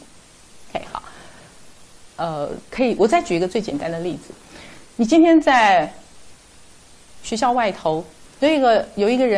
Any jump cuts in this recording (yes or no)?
yes